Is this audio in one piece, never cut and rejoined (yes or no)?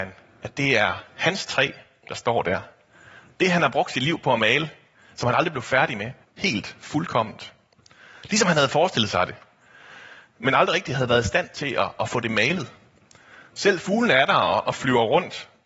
no